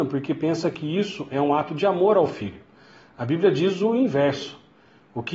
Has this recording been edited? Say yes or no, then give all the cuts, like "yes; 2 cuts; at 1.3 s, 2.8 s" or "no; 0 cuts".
no; 0 cuts